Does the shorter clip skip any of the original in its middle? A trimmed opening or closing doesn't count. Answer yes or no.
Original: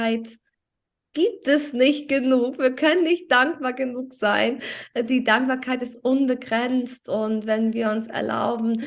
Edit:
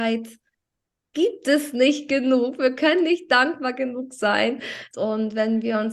yes